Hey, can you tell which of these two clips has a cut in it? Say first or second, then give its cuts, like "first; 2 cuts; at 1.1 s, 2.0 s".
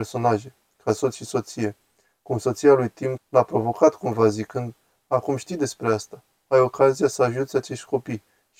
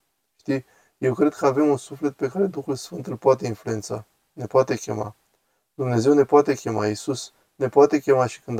first; 1 cut; at 3.2 s